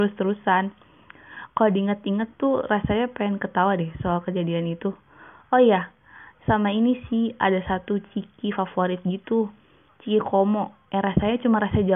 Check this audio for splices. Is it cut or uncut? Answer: uncut